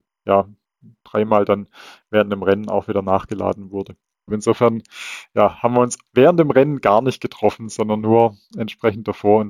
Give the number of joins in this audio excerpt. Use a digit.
2